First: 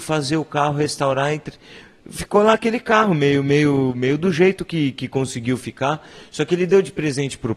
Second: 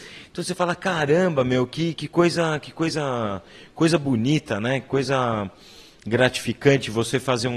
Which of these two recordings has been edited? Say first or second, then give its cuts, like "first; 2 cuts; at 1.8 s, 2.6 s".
second; 1 cut; at 1.9 s